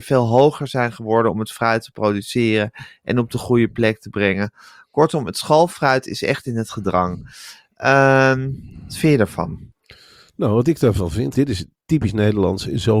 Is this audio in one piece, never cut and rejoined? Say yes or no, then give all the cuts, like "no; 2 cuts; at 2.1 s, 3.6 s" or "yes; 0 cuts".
no; 1 cut; at 11.3 s